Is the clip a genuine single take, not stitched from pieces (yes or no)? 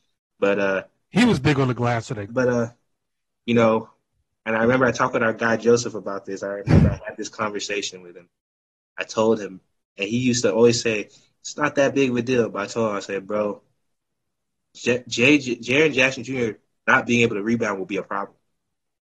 no